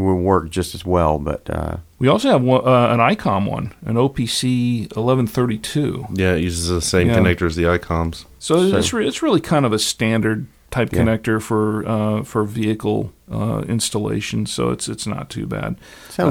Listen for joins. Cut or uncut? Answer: uncut